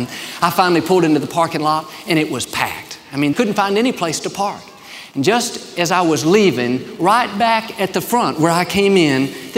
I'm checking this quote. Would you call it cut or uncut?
cut